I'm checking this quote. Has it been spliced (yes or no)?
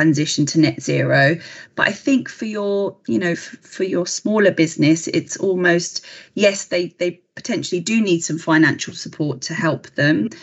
no